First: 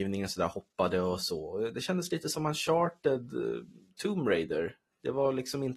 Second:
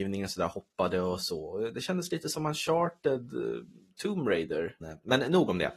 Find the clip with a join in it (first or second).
second